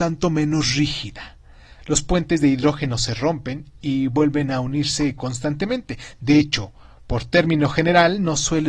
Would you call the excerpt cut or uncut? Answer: uncut